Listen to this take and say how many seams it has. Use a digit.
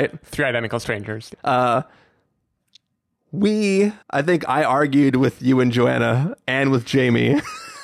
2